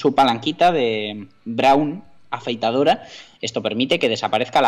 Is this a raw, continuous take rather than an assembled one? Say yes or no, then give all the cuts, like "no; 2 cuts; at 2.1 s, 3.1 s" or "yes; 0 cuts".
no; 1 cut; at 3.3 s